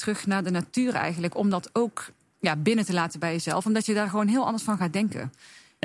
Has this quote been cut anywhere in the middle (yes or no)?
no